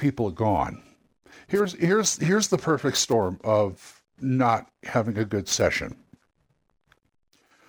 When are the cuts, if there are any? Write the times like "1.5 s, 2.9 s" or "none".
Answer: none